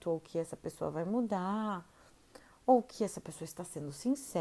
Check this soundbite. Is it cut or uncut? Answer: uncut